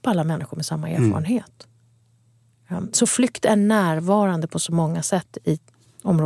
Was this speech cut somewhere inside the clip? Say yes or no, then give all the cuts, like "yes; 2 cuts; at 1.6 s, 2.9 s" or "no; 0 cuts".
no; 0 cuts